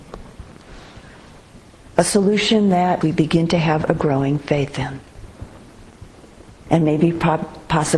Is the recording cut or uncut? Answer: cut